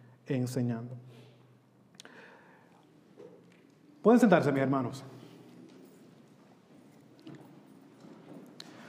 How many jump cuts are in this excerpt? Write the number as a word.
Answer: zero